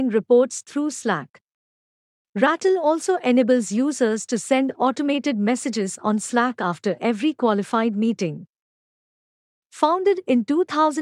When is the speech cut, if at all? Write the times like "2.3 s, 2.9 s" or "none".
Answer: none